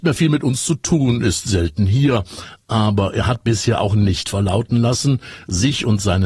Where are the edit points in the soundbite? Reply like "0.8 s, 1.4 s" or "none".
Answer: none